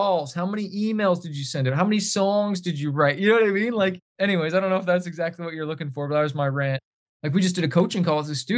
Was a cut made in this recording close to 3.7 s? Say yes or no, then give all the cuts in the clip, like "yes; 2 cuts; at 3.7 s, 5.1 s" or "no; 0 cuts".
no; 1 cut; at 7.1 s